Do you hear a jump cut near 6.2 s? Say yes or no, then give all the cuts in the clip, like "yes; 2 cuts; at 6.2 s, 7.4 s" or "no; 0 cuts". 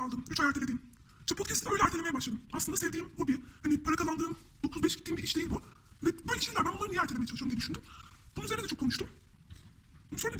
yes; 1 cut; at 6.2 s